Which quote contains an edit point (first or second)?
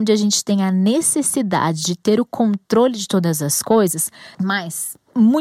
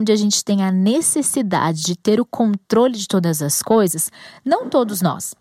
first